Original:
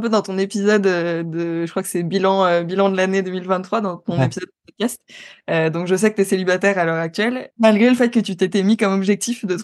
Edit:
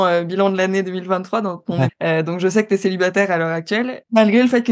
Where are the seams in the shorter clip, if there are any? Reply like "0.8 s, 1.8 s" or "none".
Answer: 1.9 s